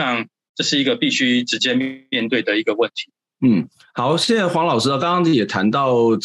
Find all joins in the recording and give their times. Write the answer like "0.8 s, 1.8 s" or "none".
none